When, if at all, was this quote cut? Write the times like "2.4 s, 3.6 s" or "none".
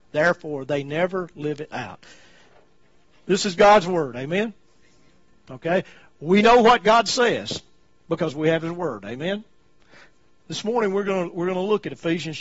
none